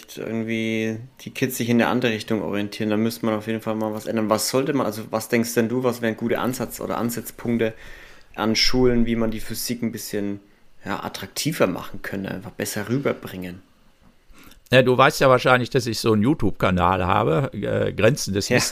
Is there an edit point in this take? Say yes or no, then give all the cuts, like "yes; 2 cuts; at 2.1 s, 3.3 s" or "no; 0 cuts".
no; 0 cuts